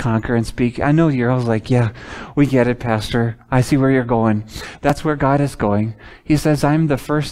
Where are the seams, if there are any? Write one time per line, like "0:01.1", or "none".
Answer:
none